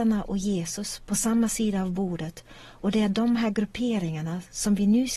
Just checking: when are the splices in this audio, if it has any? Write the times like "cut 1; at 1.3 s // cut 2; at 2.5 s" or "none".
none